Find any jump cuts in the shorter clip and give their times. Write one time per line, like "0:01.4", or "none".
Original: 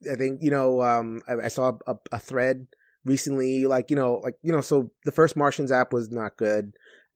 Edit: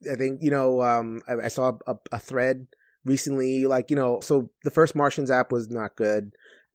0:04.2

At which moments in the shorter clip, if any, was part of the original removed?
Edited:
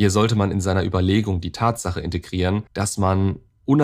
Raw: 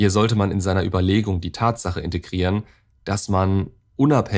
0:02.7

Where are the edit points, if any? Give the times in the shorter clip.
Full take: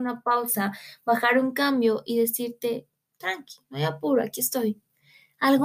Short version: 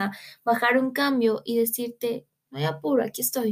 0:02.5

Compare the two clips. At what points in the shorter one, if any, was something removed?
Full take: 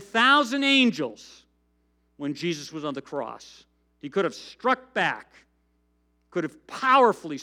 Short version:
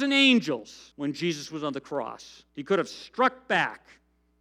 0:00.9
0:02.5

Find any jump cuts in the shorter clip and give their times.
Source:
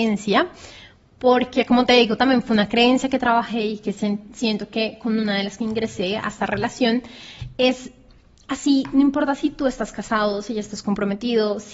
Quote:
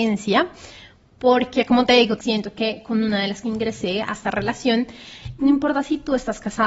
0:02.2
0:05.4

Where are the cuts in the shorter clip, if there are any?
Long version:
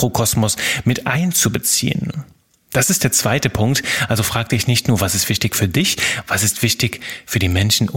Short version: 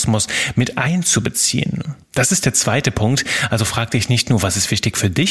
0:02.0

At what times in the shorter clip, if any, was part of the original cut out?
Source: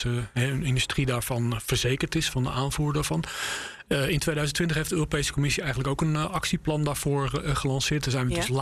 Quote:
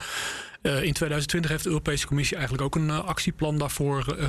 none

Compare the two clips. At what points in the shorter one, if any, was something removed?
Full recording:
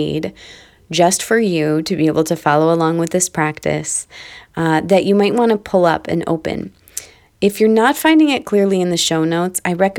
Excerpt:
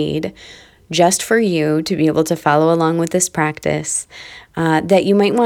none

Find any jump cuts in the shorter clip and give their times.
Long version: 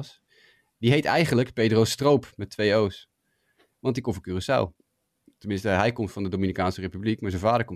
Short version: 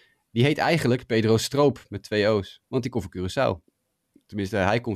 0:02.6

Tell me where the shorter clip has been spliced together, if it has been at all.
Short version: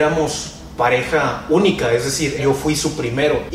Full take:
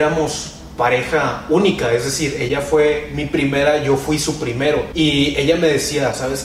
0:02.4

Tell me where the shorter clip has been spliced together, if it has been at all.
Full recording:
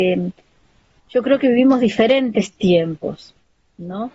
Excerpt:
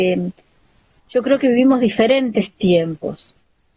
none

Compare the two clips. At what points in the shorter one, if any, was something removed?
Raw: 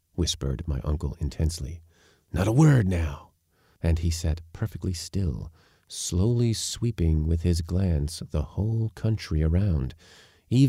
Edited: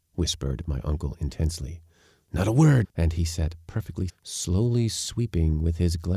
0:02.8
0:04.1

